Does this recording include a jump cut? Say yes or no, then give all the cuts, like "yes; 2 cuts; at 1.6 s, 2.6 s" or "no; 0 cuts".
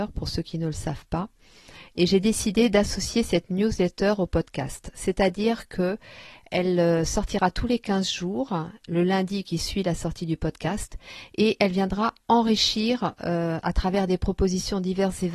no; 0 cuts